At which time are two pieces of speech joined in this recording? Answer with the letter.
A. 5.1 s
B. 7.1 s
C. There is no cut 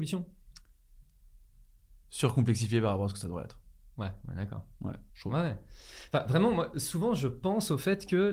A